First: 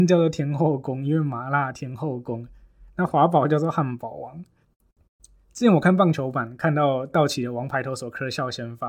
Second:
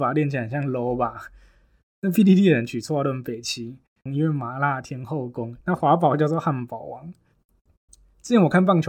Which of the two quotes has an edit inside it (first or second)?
second